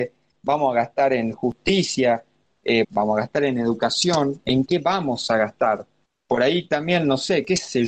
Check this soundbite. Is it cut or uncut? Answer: cut